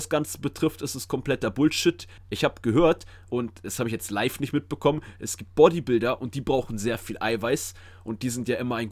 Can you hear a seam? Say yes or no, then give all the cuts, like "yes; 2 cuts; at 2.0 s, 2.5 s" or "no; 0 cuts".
yes; 1 cut; at 2.2 s